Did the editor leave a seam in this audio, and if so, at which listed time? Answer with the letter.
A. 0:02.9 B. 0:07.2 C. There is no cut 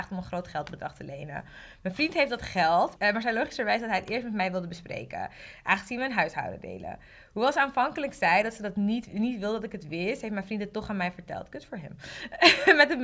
A